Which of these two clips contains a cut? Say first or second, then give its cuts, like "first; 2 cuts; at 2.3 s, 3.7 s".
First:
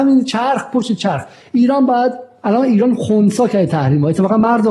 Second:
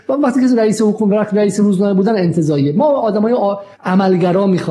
second; 1 cut; at 3.7 s